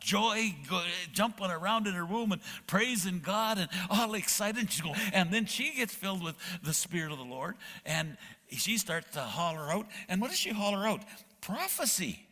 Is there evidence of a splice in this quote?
yes; 1 cut; at 4.9 s

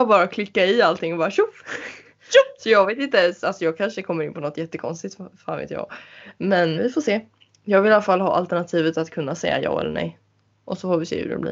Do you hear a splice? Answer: yes; 1 cut; at 6.8 s

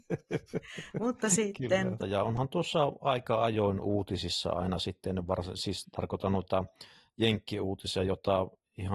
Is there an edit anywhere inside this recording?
yes; 1 cut; at 2.0 s

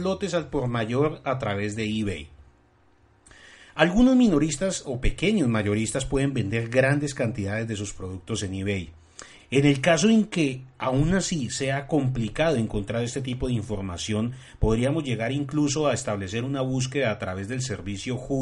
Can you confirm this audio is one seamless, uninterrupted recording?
no; 1 cut; at 9.4 s

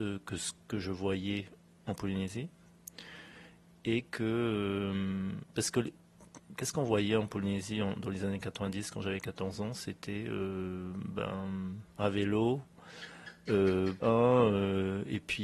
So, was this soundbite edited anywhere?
yes; 1 cut; at 14.0 s

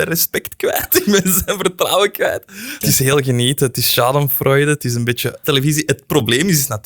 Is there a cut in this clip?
yes; 2 cuts; at 2.8 s, 5.4 s

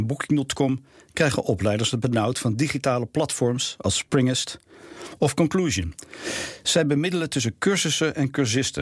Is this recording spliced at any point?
yes; 1 cut; at 5.2 s

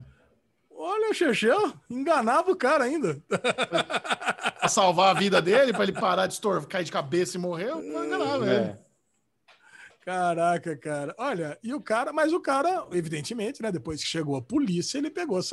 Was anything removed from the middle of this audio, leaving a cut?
no; 0 cuts

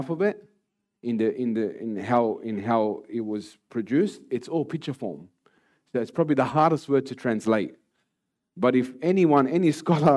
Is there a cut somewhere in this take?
no; 0 cuts

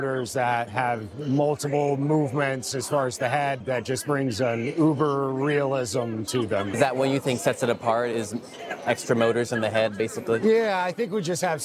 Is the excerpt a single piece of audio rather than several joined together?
yes; 0 cuts

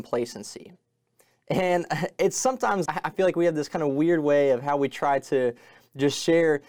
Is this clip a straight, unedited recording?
no; 2 cuts; at 1.3 s, 2.8 s

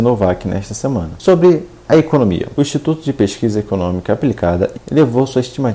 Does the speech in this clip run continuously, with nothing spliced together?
no; 1 cut; at 4.7 s

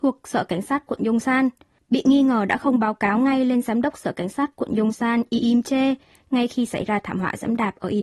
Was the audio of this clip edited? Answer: no; 0 cuts

